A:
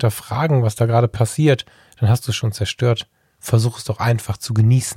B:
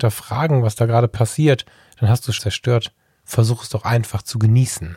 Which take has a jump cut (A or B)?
B